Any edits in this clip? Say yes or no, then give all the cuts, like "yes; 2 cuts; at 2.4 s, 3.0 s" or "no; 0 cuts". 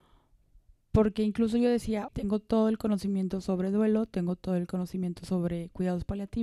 yes; 1 cut; at 2.1 s